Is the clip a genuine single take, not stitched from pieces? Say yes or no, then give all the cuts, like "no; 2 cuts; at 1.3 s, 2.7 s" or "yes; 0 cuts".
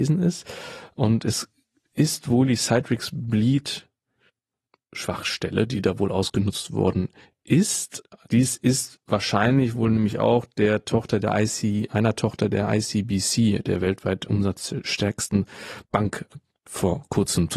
no; 1 cut; at 8.2 s